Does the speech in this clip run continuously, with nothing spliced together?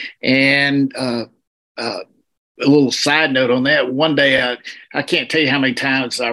yes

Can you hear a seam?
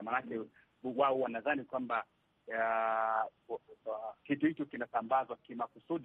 no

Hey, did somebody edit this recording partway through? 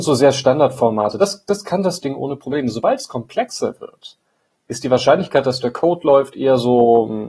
no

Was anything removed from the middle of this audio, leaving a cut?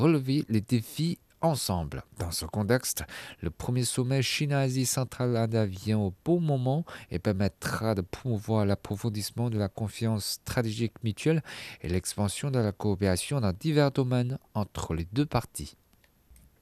yes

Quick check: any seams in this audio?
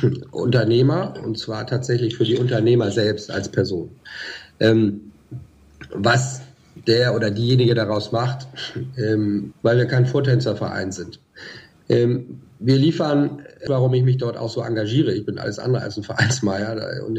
yes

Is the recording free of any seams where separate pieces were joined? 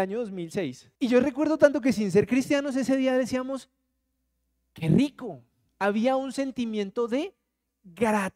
no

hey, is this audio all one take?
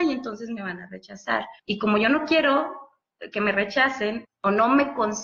no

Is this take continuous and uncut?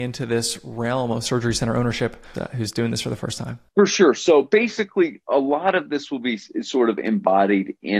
no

